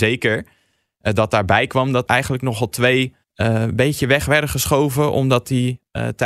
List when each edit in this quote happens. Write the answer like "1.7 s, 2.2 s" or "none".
2.1 s, 3.2 s